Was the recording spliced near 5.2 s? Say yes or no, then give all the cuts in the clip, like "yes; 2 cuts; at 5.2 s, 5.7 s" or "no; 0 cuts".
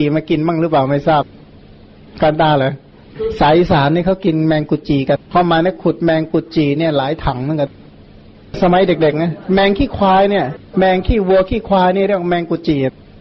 yes; 2 cuts; at 5.2 s, 10.7 s